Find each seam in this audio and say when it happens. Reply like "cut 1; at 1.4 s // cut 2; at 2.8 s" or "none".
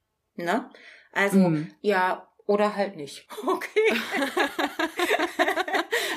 cut 1; at 1.8 s